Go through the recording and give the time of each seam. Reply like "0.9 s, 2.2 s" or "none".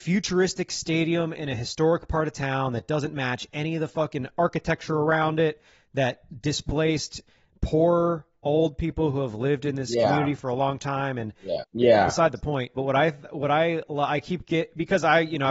11.6 s, 12.8 s